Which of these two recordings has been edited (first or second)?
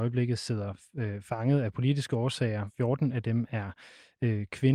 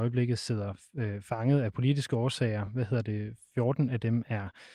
first